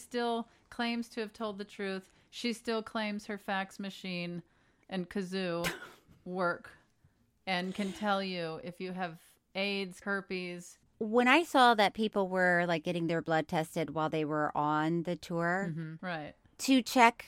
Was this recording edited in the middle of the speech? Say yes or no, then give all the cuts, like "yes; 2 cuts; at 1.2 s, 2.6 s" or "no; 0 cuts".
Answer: yes; 2 cuts; at 10.0 s, 16.0 s